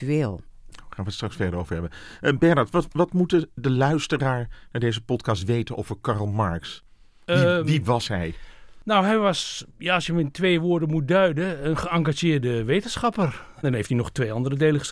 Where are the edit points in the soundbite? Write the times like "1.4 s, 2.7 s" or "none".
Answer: 9.7 s, 13.6 s